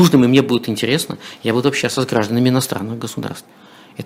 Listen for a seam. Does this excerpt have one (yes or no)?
no